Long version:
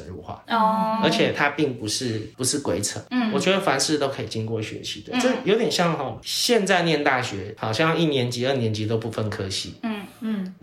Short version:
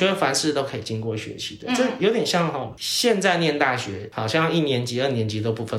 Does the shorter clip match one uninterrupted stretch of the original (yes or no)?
yes